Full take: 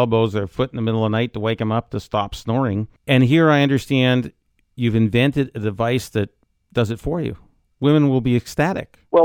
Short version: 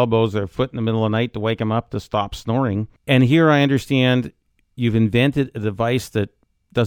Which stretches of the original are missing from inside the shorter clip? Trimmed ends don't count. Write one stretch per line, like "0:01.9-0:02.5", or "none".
none